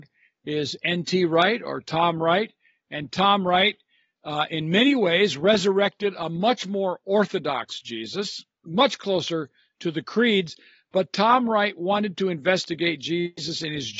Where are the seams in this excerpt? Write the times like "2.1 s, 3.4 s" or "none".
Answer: none